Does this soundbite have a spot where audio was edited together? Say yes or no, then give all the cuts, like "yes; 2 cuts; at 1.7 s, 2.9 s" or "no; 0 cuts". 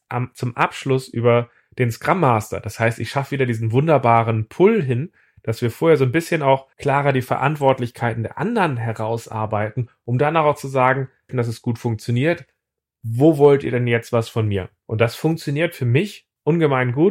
yes; 2 cuts; at 6.7 s, 11.3 s